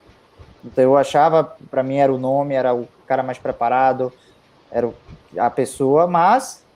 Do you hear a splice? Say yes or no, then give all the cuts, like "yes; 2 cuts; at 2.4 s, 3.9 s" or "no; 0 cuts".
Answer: yes; 1 cut; at 1.6 s